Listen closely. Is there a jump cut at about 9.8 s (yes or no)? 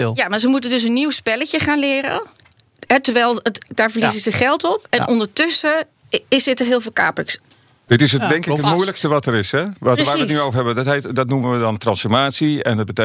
no